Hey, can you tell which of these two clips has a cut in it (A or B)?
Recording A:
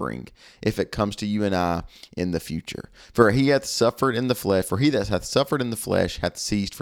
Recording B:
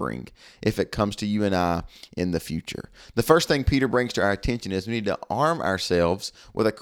A